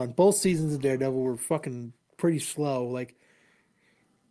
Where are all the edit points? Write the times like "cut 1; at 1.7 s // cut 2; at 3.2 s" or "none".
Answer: none